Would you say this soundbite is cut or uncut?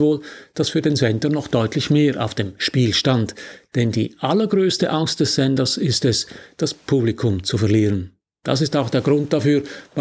uncut